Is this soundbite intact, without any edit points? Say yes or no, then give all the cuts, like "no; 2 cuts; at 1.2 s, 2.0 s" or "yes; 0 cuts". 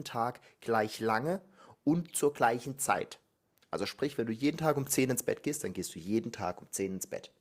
yes; 0 cuts